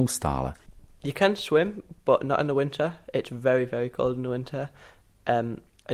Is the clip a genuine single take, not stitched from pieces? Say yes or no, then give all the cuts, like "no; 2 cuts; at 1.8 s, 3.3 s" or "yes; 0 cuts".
yes; 0 cuts